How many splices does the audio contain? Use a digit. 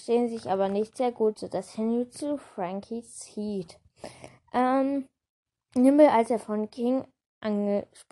0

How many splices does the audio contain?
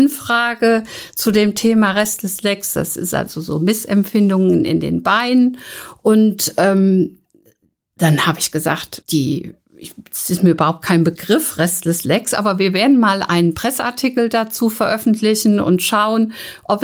1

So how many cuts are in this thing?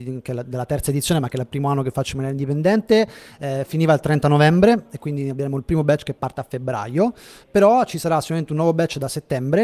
0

